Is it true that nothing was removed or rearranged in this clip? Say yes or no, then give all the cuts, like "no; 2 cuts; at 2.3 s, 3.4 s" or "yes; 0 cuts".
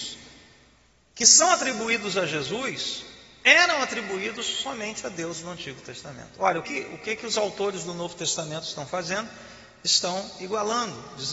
no; 1 cut; at 6.6 s